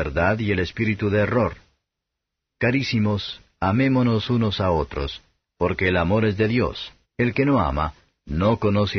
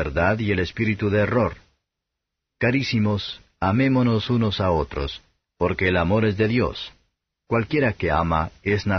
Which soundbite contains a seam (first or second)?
first